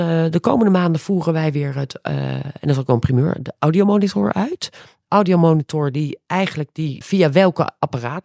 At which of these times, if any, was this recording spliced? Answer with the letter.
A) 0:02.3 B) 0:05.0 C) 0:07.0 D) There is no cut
C